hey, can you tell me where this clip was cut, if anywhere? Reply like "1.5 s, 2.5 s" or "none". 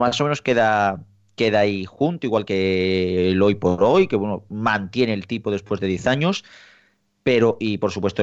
none